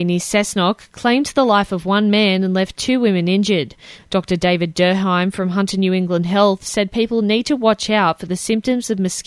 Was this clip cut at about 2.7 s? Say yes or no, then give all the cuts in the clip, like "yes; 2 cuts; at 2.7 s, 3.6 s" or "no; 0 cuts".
no; 1 cut; at 3.9 s